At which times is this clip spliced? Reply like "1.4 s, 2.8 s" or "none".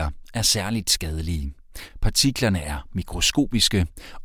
none